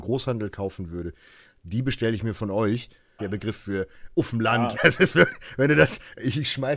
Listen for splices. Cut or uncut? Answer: cut